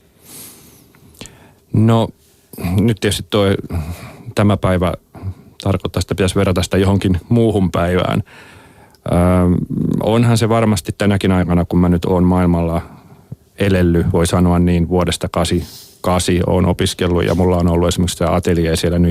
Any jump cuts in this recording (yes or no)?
no